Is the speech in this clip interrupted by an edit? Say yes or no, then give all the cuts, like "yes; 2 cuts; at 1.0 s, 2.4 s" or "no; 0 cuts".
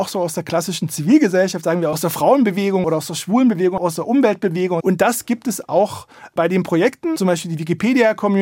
yes; 2 cuts; at 4.8 s, 7.2 s